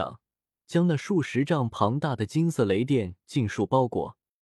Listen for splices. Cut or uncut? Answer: uncut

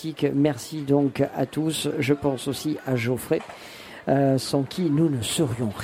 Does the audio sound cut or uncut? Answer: uncut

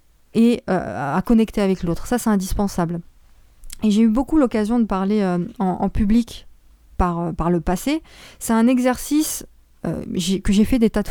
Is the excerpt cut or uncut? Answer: uncut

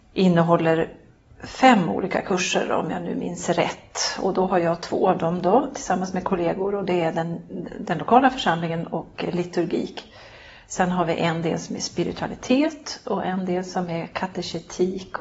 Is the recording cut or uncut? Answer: uncut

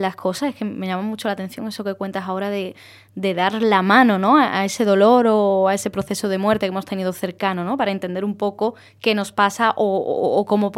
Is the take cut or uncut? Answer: uncut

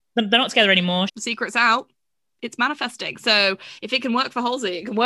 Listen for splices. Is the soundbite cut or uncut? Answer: cut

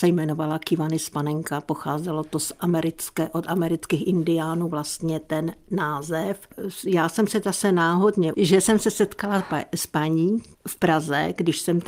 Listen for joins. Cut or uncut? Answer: cut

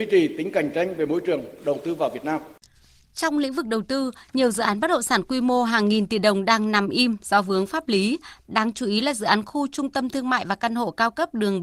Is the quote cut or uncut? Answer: cut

